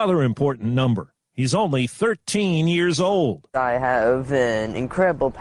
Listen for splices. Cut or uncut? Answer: uncut